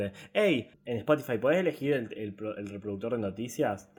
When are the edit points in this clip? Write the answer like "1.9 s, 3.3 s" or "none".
2.1 s